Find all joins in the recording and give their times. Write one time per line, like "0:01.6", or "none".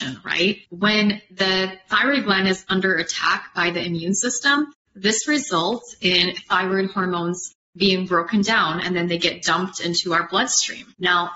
none